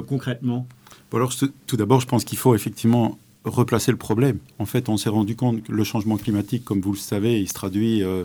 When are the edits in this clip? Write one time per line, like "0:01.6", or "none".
none

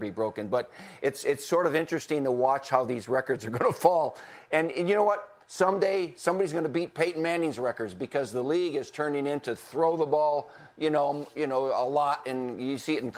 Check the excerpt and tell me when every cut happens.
none

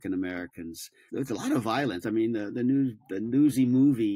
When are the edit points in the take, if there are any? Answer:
0:01.1

